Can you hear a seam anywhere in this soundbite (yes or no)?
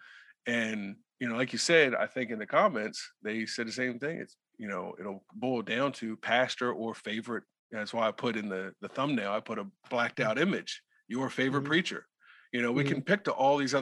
no